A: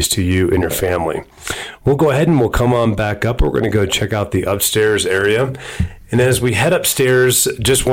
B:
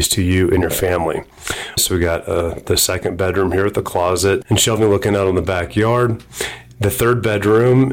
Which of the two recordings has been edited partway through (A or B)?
B